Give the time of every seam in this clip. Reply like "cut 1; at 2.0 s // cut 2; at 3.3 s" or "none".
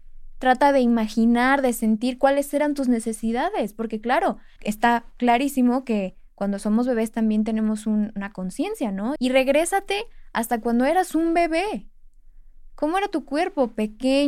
cut 1; at 4.6 s // cut 2; at 9.2 s